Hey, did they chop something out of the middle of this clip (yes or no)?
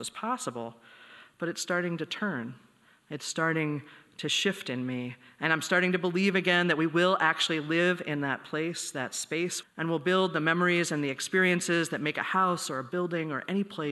yes